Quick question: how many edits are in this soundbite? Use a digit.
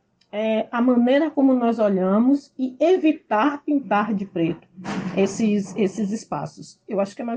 0